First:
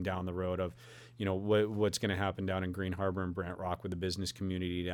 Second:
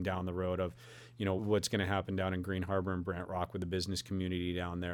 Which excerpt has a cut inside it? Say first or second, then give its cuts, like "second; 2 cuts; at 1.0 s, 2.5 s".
second; 1 cut; at 1.4 s